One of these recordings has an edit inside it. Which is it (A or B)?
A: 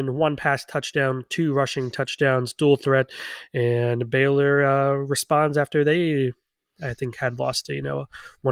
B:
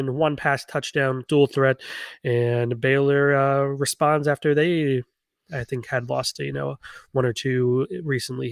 B